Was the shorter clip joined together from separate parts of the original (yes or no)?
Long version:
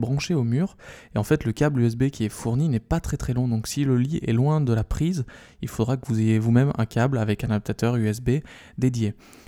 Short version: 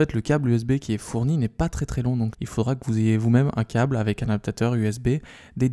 yes